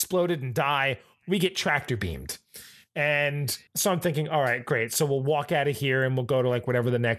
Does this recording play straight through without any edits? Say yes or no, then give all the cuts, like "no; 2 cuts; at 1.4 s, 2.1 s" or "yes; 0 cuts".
no; 1 cut; at 3.7 s